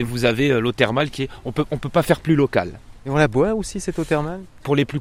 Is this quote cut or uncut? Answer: uncut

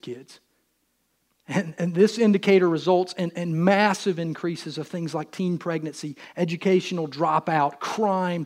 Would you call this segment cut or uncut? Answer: uncut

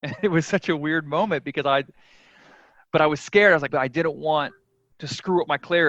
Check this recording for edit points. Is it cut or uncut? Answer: cut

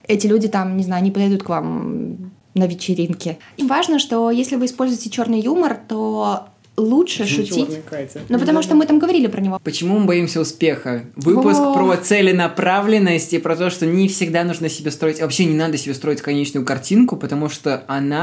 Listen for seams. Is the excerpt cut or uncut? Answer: cut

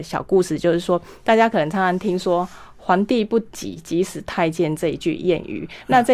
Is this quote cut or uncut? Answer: uncut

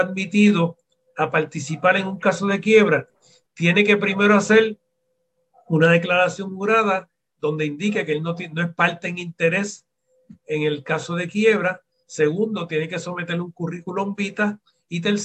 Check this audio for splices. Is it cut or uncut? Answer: uncut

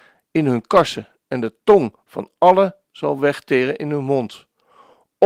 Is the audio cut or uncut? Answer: uncut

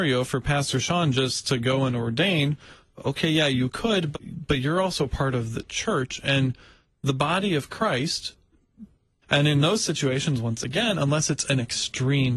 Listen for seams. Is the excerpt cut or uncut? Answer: cut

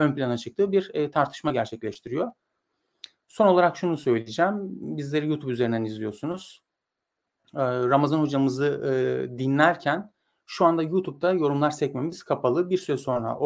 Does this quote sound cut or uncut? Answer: uncut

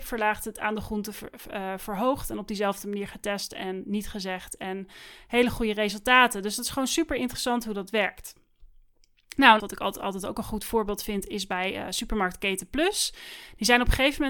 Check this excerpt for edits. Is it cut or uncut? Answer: cut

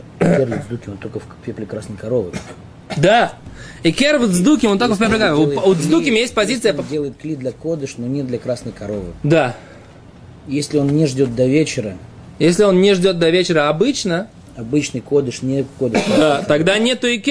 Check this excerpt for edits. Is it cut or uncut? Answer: uncut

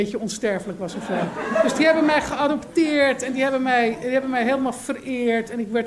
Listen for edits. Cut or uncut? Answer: uncut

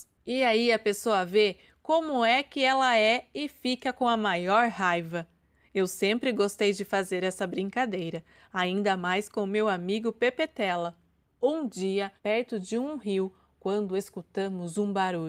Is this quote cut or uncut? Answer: cut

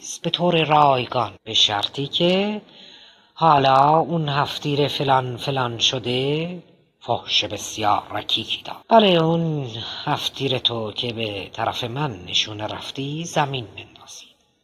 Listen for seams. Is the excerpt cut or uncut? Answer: cut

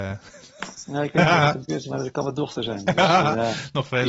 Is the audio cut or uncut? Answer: uncut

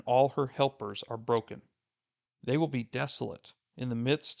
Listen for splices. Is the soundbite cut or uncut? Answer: cut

